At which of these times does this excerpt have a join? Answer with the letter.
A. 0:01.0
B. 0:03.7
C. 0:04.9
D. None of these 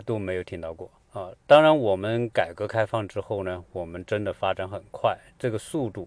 A